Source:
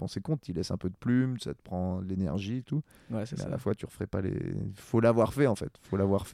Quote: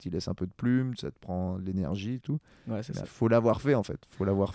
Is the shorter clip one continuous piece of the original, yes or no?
no